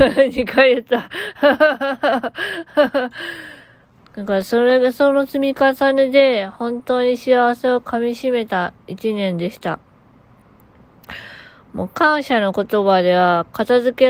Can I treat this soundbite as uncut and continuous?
no; 1 cut; at 4.0 s

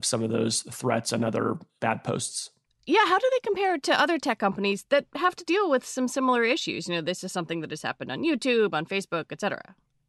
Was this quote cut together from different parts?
no; 0 cuts

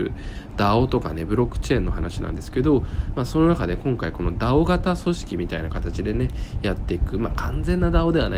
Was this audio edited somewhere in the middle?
no; 0 cuts

